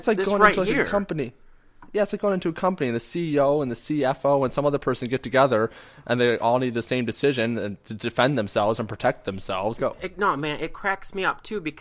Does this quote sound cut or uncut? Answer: cut